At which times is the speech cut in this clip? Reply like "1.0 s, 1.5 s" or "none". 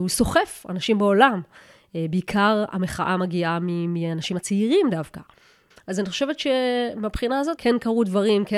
5.7 s, 7.6 s